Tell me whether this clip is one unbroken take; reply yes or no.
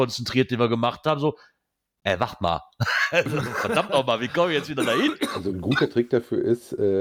yes